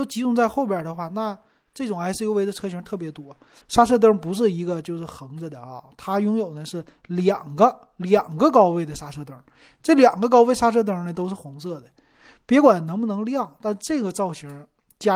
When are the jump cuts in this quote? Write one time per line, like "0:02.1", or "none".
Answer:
0:03.6